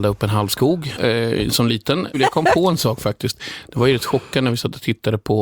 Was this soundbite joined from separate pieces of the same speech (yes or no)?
yes